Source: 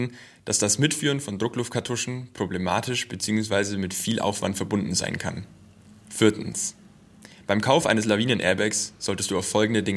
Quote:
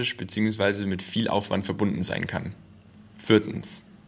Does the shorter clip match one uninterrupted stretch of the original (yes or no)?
yes